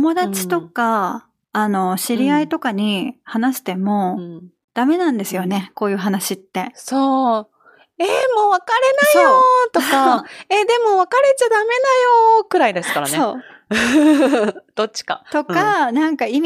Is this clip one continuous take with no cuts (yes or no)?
yes